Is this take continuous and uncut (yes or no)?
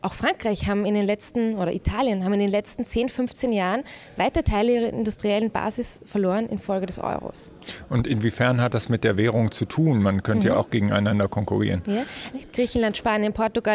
no